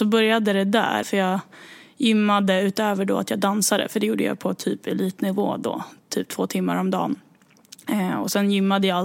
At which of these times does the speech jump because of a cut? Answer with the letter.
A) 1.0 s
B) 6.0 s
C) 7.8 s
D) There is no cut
A